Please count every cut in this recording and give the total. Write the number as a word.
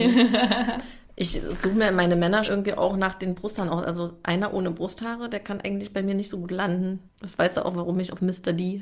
two